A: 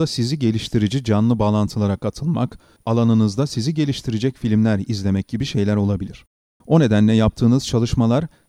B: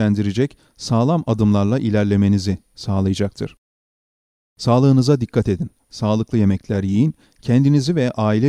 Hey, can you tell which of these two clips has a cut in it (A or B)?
A